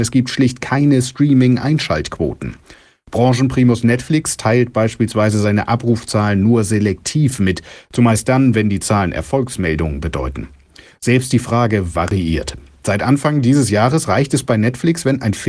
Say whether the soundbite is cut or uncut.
cut